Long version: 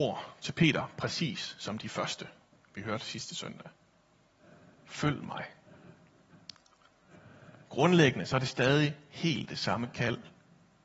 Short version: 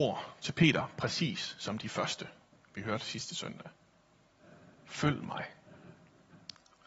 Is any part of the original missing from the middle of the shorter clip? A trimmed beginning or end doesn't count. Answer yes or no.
no